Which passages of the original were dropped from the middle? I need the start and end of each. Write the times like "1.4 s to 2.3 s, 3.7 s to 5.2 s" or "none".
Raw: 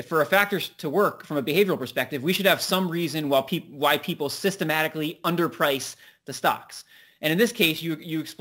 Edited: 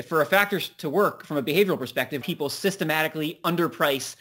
2.2 s to 4.0 s